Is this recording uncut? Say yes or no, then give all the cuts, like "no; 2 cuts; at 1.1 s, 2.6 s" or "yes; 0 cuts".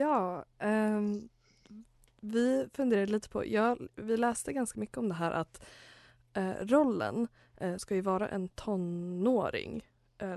no; 1 cut; at 7.8 s